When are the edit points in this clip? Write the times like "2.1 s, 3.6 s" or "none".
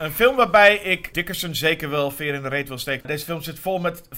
1.1 s, 3.0 s